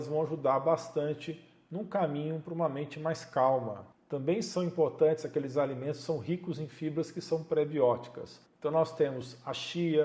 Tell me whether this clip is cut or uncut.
cut